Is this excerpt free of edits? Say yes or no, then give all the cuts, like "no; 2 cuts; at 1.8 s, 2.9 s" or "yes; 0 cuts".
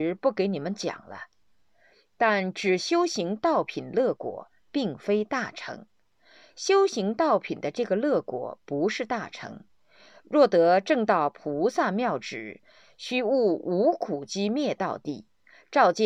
yes; 0 cuts